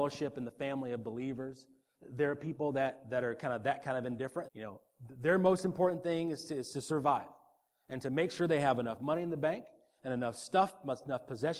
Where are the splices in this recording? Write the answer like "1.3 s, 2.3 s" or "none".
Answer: 4.4 s